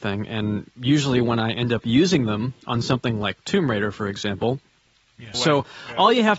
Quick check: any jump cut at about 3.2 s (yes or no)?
no